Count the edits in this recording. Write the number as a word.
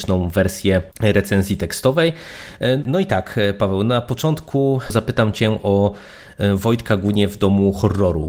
one